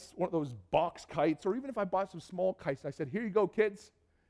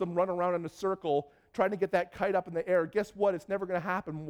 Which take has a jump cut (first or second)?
first